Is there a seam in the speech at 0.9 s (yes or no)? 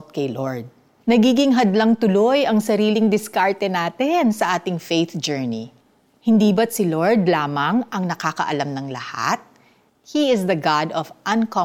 no